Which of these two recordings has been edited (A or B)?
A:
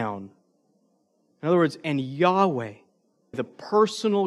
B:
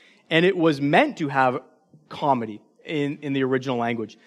A